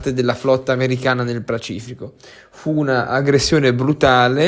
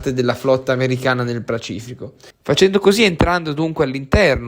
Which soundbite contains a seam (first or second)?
second